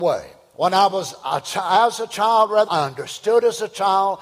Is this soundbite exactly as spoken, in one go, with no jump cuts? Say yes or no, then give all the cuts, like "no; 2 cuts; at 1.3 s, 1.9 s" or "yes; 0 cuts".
no; 1 cut; at 2.7 s